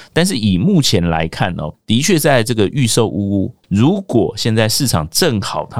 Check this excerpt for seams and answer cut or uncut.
cut